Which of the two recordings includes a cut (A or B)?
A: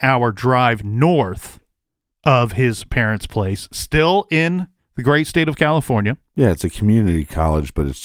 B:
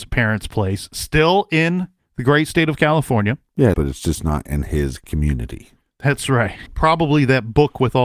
B